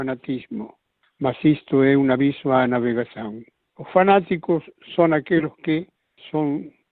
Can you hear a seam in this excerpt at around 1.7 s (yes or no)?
no